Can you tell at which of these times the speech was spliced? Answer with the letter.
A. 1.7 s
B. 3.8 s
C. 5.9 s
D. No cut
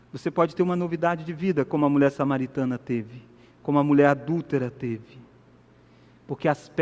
D